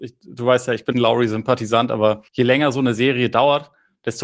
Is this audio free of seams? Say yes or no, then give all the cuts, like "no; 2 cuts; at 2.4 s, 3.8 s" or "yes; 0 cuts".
no; 2 cuts; at 0.9 s, 2.3 s